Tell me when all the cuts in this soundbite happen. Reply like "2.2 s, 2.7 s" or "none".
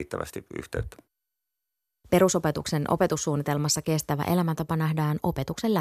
2.0 s